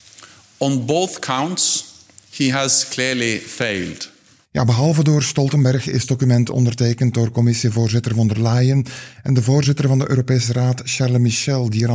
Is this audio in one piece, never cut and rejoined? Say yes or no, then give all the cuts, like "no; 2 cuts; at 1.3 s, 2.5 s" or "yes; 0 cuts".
yes; 0 cuts